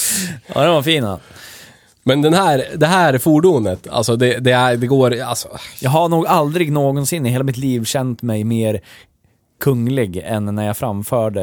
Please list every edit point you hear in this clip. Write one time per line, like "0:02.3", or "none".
none